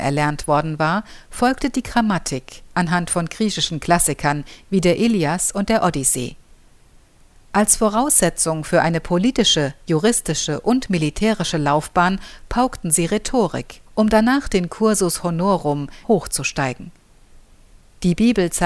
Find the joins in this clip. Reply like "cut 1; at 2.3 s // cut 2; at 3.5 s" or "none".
cut 1; at 13.9 s // cut 2; at 16.0 s